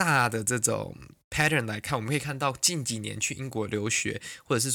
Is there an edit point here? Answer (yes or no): no